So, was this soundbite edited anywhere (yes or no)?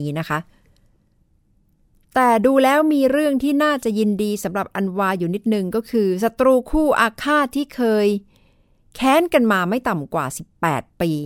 no